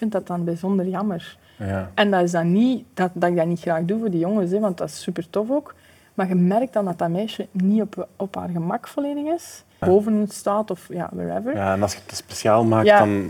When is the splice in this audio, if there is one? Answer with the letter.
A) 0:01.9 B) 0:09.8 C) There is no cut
B